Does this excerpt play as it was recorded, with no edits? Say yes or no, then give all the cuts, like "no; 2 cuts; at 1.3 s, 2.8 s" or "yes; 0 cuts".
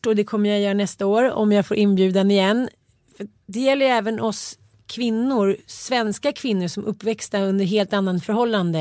yes; 0 cuts